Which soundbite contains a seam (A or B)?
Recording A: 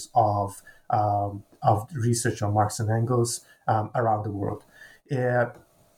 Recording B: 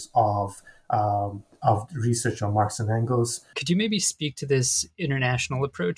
B